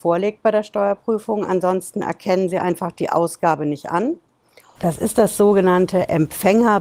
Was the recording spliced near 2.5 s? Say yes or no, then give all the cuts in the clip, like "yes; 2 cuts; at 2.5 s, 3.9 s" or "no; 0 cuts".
no; 1 cut; at 4.8 s